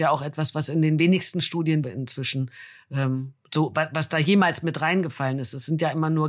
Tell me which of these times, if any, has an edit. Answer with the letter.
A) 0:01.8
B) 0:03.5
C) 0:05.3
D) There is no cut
A